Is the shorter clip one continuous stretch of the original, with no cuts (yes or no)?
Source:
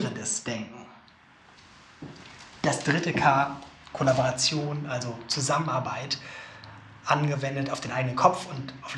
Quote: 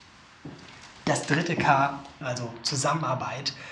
no